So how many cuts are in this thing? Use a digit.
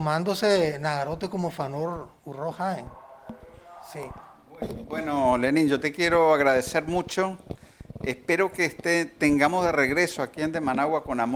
0